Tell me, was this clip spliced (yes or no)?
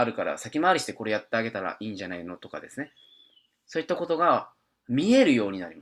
no